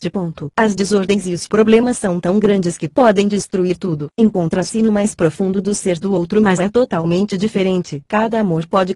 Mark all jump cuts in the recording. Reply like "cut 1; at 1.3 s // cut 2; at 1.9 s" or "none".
cut 1; at 4.1 s // cut 2; at 6.6 s